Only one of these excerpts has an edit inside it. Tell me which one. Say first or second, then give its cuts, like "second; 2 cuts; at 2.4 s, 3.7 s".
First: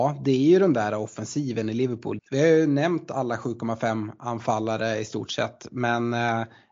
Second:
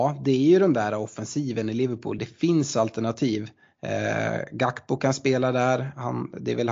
first; 1 cut; at 2.2 s